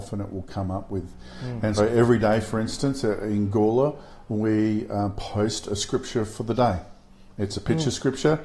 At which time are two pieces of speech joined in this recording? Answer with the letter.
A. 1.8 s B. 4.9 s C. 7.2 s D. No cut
A